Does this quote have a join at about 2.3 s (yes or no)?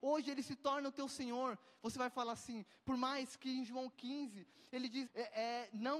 no